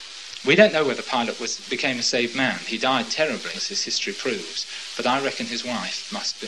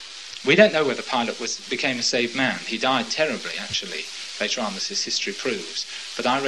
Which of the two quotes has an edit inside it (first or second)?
first